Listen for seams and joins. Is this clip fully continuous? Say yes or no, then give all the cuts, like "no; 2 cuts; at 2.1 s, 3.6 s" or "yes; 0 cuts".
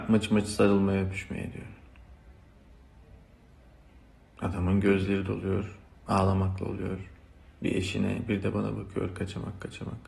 yes; 0 cuts